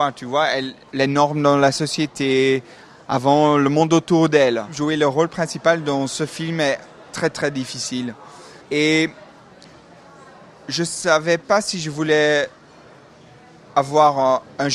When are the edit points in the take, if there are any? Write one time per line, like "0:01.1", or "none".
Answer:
0:00.9
0:08.6

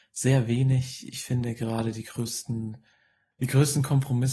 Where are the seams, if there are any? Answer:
none

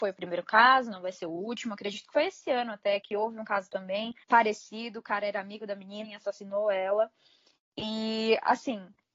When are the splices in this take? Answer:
0:03.0
0:04.2
0:06.0

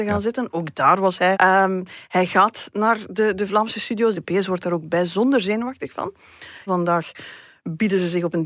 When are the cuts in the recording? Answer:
0:01.3
0:04.1
0:06.7

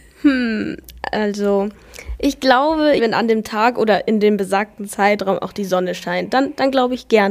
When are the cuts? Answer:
0:03.0

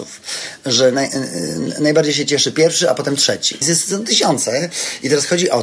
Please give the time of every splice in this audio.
0:03.6

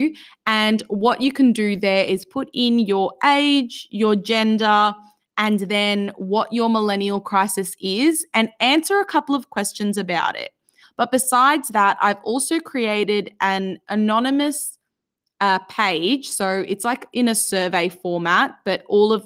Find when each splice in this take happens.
0:10.8

